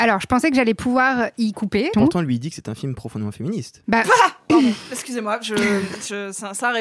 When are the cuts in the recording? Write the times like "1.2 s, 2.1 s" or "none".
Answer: 1.9 s